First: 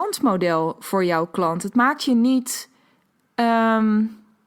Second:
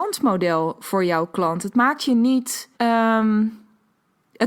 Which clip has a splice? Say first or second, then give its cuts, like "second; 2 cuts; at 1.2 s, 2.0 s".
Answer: second; 1 cut; at 2.7 s